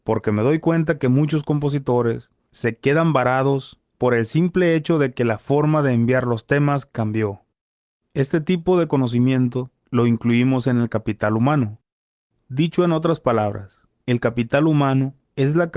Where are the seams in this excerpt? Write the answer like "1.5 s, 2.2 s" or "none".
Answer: none